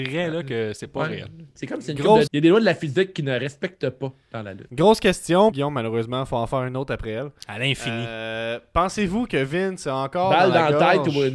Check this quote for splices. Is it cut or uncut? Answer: cut